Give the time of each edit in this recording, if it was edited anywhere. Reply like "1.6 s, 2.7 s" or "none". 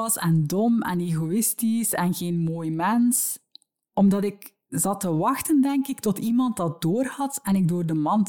none